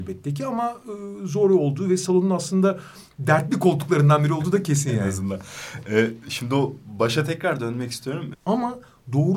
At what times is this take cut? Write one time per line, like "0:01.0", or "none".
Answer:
0:08.3